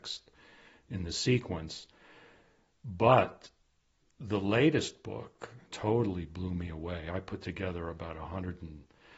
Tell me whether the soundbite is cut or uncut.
cut